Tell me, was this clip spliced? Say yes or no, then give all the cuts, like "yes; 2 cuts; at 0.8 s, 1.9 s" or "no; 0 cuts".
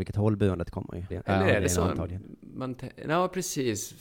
yes; 1 cut; at 1.1 s